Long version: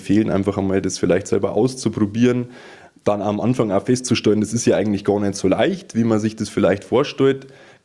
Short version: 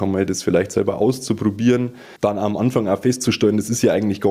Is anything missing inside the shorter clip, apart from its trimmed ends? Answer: yes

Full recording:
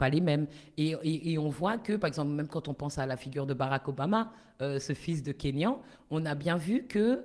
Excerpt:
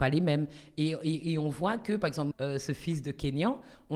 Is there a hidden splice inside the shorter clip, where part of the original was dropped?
yes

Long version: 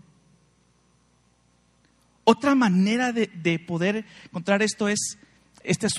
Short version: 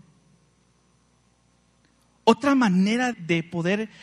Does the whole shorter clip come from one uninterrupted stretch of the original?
no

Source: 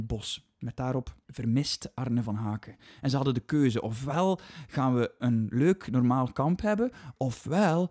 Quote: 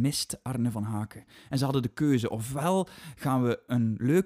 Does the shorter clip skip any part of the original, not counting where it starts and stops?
no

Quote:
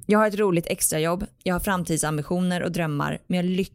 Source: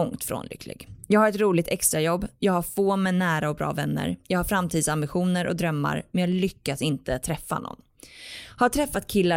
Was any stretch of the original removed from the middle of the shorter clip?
yes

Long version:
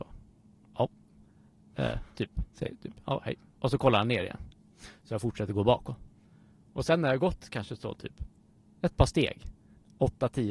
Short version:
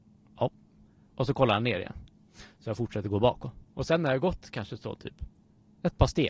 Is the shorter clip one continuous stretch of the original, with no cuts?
no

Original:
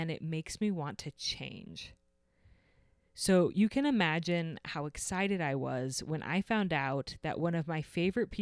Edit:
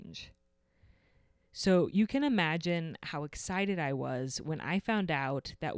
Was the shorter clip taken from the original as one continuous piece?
yes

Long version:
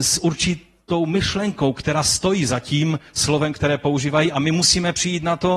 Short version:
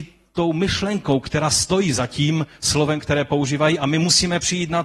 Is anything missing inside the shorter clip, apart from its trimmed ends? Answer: no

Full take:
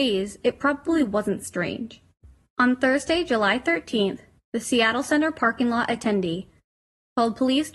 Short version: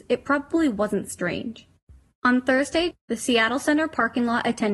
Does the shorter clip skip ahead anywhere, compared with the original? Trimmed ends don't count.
yes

